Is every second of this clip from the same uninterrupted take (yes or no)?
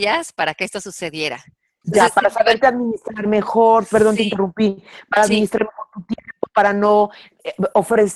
no